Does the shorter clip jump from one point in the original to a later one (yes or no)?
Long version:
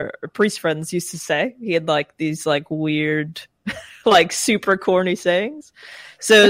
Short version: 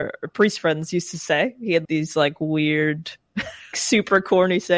yes